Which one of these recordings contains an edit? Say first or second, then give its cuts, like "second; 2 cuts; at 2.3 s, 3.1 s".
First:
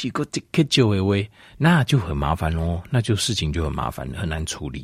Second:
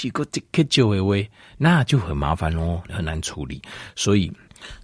second; 1 cut; at 2.9 s